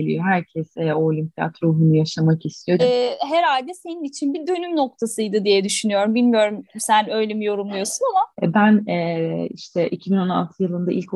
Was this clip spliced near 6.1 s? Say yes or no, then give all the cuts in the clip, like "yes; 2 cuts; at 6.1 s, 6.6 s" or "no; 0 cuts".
no; 2 cuts; at 2.8 s, 8.3 s